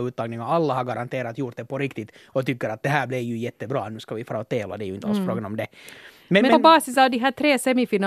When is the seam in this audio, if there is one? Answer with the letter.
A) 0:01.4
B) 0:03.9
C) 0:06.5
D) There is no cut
C